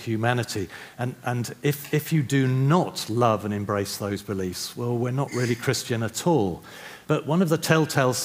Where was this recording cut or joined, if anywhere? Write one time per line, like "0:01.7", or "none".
0:07.1